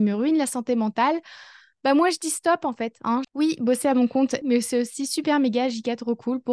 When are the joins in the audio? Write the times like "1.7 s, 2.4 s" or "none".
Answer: 3.2 s, 4.4 s

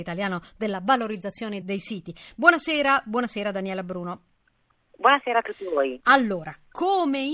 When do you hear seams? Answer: 1.6 s

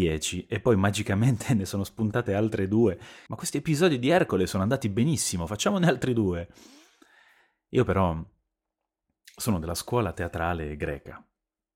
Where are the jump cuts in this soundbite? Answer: 3.3 s

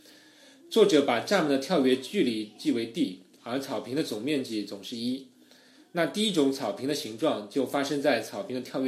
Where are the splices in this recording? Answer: none

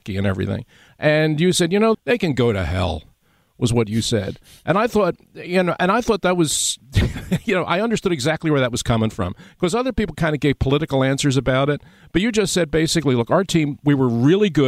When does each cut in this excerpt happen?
1.9 s

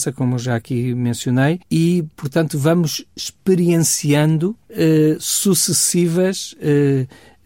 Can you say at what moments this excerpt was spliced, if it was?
1.6 s, 4.6 s

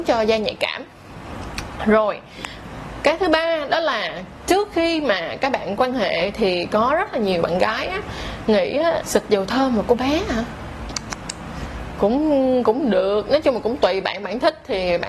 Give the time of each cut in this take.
9.0 s

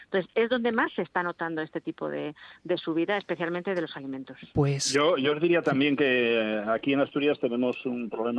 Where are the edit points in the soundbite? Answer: 4.5 s

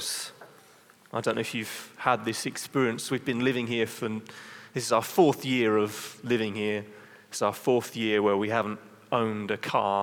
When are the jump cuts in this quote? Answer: none

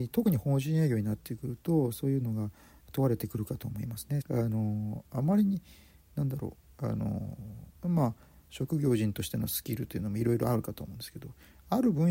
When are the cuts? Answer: 4.2 s, 7.8 s

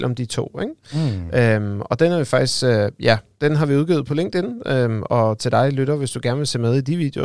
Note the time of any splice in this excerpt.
none

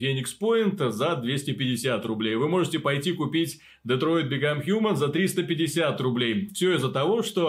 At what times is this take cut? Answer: none

